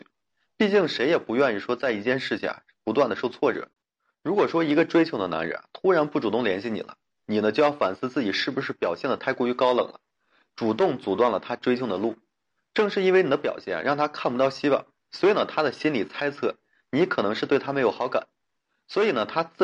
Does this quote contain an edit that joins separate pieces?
no; 0 cuts

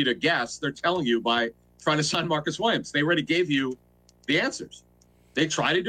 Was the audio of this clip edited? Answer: no; 0 cuts

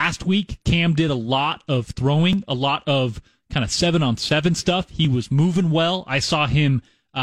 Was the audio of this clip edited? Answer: no; 0 cuts

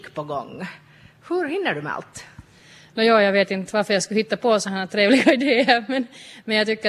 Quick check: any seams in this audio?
no; 0 cuts

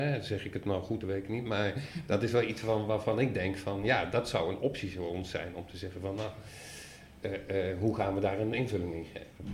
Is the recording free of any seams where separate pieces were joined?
yes; 0 cuts

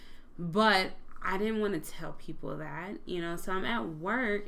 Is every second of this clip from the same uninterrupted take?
yes; 0 cuts

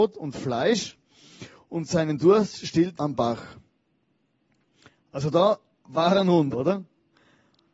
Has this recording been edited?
yes; 2 cuts; at 3.0 s, 6.5 s

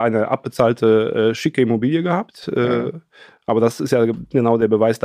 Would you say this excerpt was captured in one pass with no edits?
yes; 0 cuts

